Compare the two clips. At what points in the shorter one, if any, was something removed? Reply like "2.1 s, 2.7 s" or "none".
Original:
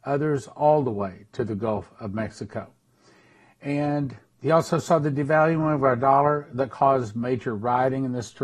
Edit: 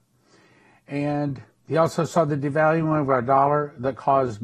none